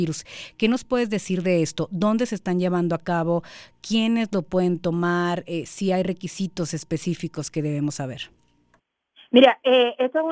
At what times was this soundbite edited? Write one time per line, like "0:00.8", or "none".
none